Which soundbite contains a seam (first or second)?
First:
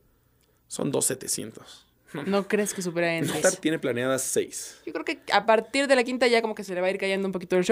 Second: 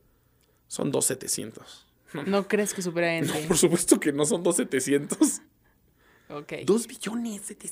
first